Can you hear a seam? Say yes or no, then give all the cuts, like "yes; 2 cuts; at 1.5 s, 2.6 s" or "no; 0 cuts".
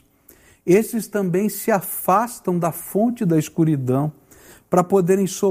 no; 0 cuts